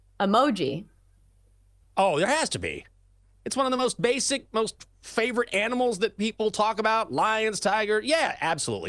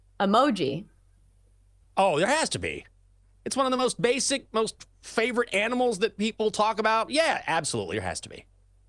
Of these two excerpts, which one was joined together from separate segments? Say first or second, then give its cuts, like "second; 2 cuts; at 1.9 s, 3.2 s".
second; 1 cut; at 7.1 s